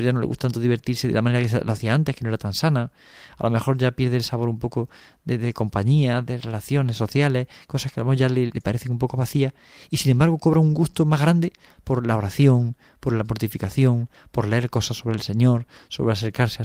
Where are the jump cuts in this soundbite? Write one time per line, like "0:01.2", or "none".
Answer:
0:08.5